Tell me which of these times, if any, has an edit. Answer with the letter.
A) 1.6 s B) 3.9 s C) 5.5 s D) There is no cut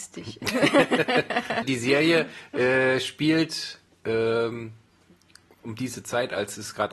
A